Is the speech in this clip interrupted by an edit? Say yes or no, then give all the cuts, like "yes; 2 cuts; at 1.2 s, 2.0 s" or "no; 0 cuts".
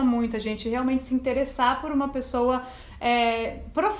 no; 0 cuts